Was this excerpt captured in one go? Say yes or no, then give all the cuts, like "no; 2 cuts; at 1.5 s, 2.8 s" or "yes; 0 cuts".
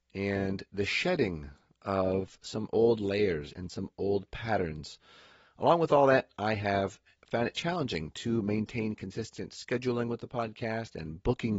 yes; 0 cuts